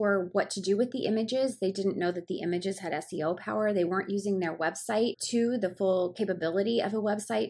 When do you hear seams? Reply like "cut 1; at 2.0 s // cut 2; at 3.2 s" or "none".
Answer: none